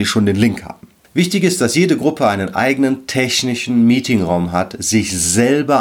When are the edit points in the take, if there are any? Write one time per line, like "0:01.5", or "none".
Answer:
0:01.0